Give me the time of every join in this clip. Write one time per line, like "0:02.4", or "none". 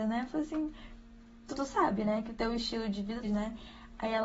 0:01.5
0:03.2